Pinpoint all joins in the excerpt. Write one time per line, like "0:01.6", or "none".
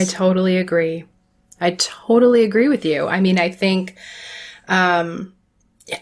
none